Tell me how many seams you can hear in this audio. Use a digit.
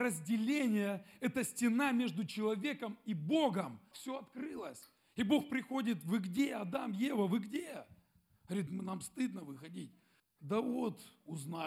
3